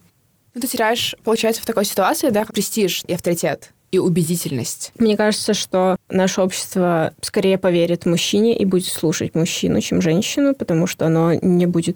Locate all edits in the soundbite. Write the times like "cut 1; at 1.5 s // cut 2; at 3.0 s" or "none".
cut 1; at 2.5 s

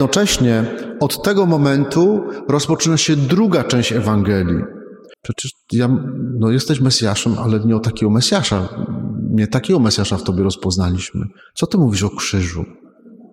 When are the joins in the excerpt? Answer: cut 1; at 5.1 s

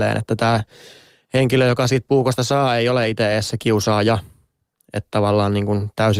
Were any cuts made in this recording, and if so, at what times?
none

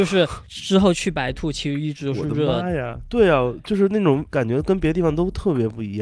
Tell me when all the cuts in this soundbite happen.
none

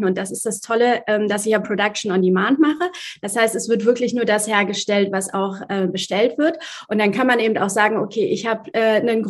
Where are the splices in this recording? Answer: none

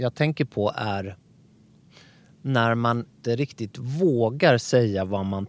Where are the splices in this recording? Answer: cut 1; at 3.1 s

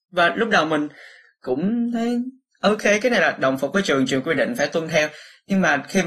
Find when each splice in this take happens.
none

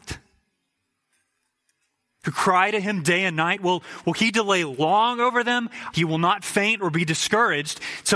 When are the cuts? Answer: cut 1; at 5.9 s

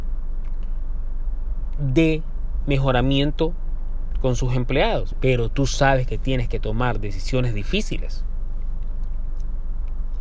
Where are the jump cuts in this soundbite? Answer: cut 1; at 5.1 s

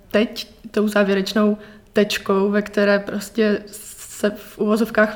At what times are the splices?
none

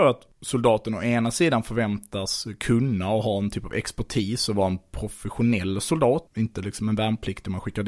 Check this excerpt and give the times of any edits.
cut 1; at 6.3 s

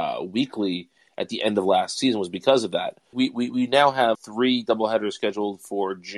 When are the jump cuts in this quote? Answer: cut 1; at 3.1 s // cut 2; at 4.1 s

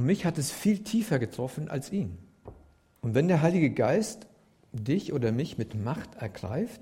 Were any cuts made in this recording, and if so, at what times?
cut 1; at 3.0 s

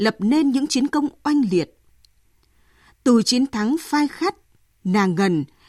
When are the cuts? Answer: none

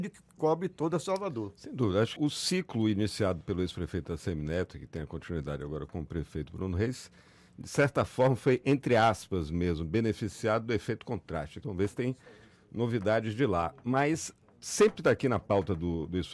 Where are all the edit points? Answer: cut 1; at 2.2 s // cut 2; at 11.6 s

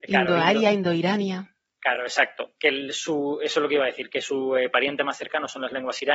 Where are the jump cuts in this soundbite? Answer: none

